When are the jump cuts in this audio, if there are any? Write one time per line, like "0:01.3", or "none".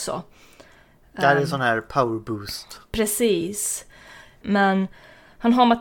0:04.4

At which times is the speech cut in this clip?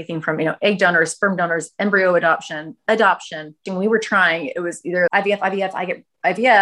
0:03.7
0:05.1

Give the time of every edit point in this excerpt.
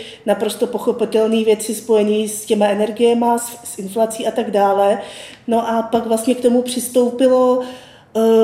none

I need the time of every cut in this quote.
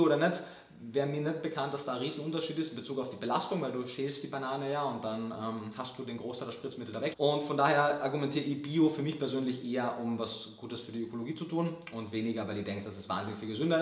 0:07.1

